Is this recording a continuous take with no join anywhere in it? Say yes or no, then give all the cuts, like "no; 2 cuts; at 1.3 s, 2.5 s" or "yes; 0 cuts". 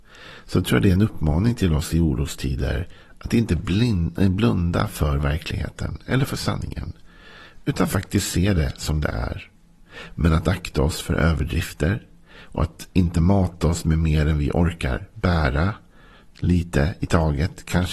yes; 0 cuts